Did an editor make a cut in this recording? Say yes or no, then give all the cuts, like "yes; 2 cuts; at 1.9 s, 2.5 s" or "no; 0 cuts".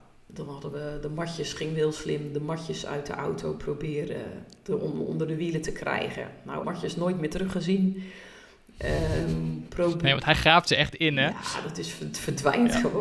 yes; 1 cut; at 6.6 s